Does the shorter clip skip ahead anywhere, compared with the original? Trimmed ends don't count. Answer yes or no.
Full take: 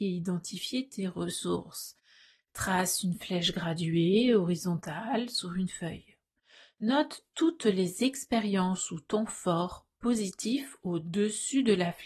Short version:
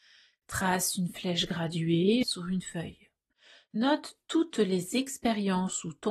yes